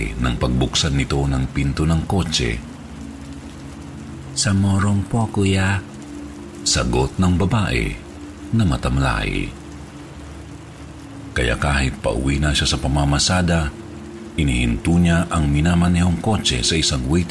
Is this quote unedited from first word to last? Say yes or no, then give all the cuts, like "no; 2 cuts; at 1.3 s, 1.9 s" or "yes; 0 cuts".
no; 1 cut; at 11.3 s